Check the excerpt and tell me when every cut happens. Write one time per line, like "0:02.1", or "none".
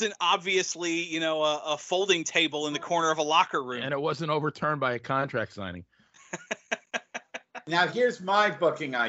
none